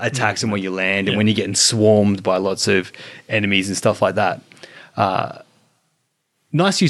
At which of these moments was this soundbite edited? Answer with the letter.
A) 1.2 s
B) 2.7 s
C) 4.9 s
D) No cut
D